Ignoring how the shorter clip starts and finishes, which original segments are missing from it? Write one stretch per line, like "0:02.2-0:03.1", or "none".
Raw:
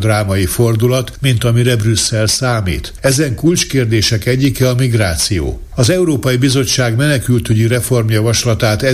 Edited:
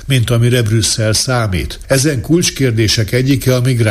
none